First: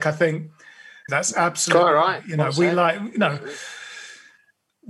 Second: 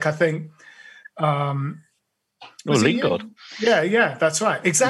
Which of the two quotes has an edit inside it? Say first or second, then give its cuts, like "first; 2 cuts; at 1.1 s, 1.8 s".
first; 1 cut; at 1.1 s